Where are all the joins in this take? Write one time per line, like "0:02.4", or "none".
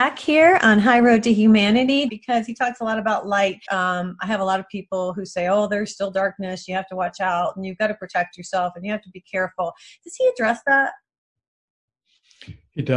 0:02.1
0:03.7